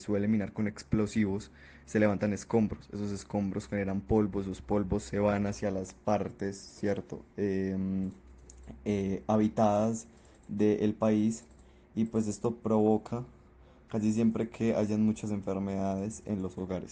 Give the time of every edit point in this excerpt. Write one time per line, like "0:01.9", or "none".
none

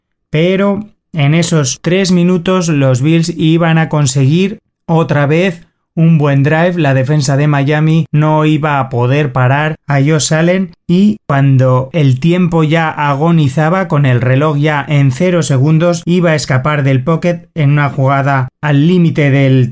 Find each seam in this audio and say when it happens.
0:18.6

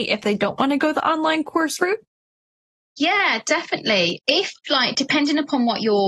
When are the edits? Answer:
none

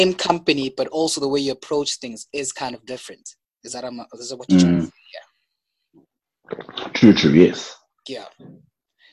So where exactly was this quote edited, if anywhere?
none

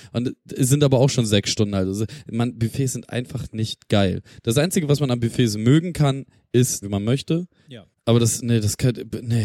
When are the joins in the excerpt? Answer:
0:06.8
0:07.9

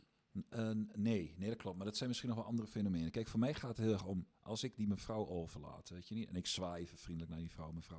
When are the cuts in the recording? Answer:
none

